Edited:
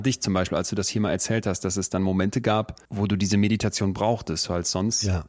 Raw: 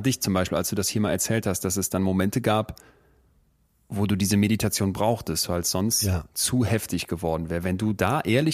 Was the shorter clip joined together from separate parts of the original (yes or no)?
yes